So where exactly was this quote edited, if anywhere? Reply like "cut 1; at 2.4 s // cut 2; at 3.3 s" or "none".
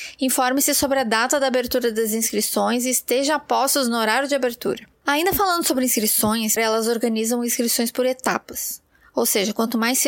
cut 1; at 4.9 s // cut 2; at 6.6 s